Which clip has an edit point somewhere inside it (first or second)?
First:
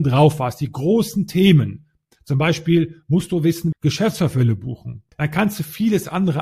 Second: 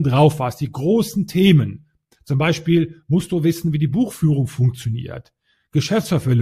first